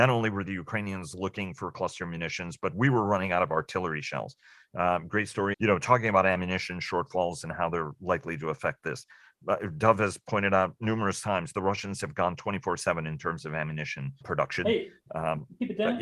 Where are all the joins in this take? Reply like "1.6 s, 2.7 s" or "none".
5.5 s, 14.2 s